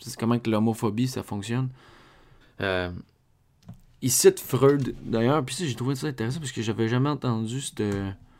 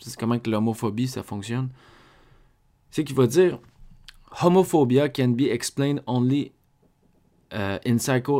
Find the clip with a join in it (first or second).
first